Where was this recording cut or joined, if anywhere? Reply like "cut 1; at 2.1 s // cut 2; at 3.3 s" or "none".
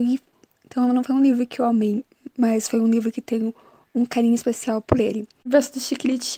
cut 1; at 5.4 s